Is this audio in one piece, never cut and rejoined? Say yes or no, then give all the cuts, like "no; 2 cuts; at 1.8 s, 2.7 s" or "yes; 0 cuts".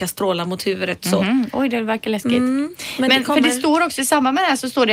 yes; 0 cuts